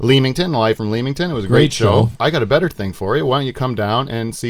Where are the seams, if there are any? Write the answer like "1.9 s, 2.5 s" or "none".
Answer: 2.1 s